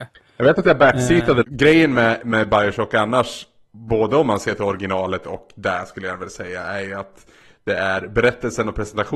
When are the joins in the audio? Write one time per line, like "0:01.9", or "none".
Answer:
0:01.4